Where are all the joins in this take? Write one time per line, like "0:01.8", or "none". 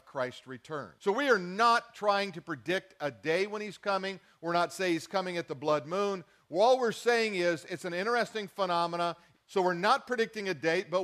0:01.0
0:09.3

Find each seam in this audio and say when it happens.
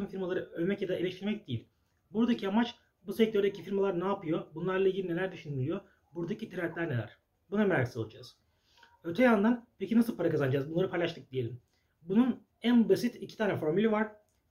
none

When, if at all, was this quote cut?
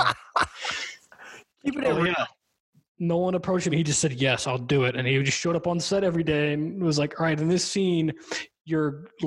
none

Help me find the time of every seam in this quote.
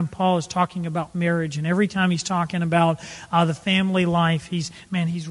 none

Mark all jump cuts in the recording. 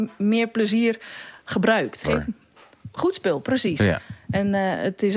0:02.0

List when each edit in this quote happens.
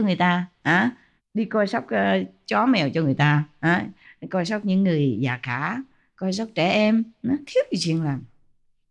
none

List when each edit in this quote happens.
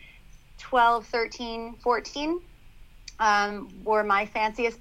none

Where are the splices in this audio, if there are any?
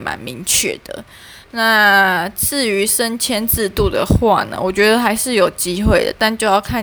none

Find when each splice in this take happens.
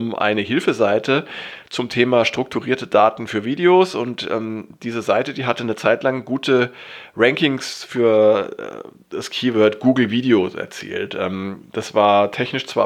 none

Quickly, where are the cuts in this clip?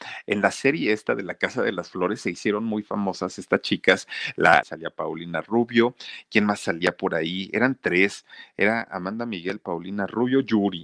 0:04.6

